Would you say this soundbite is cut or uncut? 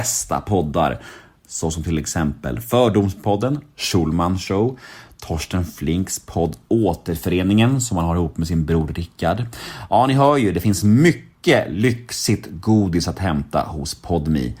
uncut